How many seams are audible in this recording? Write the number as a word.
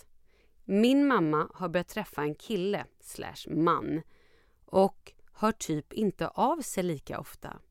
zero